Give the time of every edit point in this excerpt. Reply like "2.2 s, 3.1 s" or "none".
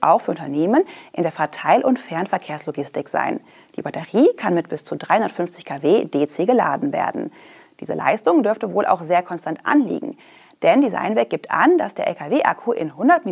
none

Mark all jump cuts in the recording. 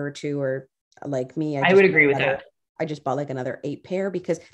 none

